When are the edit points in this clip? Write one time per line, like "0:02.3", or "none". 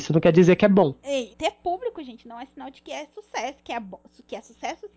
0:01.3